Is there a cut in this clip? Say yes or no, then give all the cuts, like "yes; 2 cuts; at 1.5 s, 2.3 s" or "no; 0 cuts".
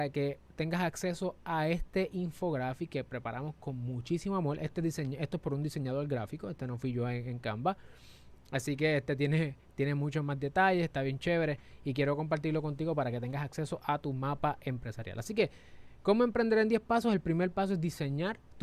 no; 0 cuts